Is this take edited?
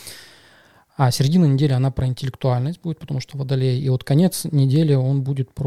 no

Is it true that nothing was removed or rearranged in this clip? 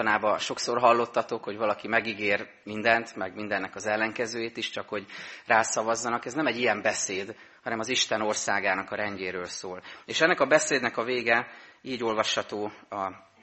yes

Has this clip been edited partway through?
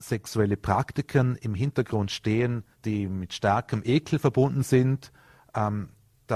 yes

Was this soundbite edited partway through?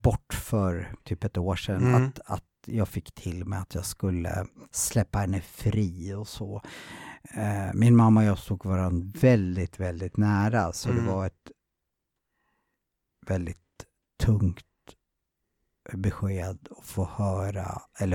no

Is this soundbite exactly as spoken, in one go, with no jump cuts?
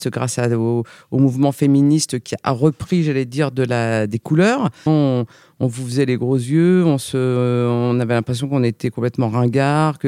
no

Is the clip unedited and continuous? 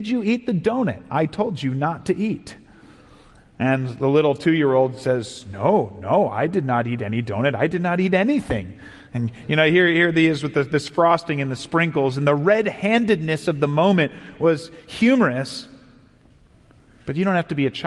yes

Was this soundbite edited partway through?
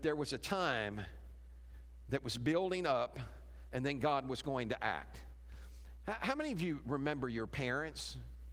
no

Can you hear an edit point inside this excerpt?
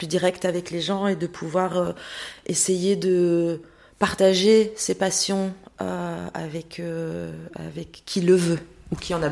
no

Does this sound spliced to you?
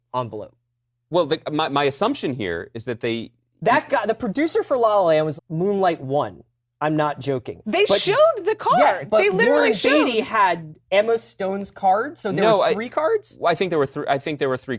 yes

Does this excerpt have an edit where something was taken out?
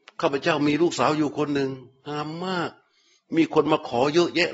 no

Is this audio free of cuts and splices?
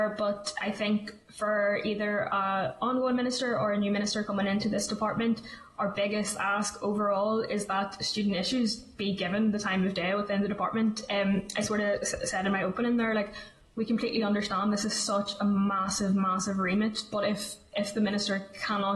yes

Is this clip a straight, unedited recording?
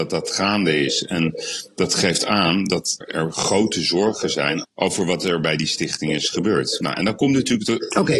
no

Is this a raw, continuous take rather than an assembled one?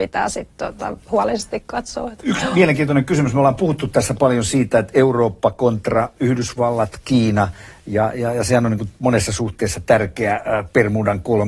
yes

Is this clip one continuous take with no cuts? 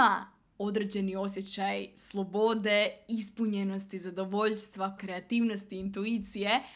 no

